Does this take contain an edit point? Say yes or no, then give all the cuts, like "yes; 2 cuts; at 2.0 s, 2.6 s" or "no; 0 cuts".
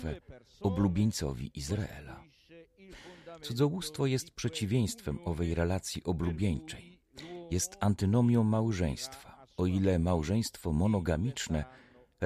no; 0 cuts